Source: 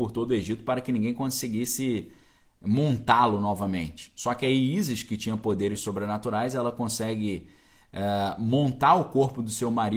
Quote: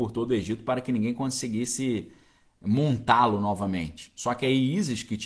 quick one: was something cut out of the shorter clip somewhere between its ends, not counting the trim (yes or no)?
no